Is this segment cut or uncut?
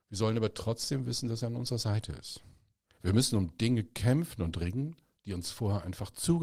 uncut